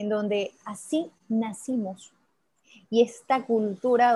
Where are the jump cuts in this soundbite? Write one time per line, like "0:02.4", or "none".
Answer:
none